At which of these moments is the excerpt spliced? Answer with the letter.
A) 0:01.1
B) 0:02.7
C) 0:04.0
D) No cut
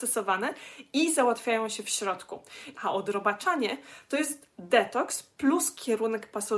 B